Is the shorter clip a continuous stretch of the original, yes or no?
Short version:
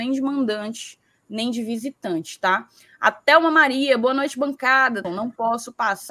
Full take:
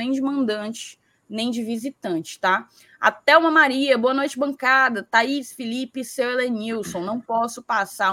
no